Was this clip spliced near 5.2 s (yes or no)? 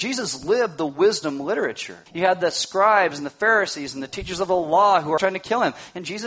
yes